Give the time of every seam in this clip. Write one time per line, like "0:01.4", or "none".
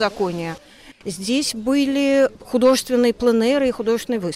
0:00.9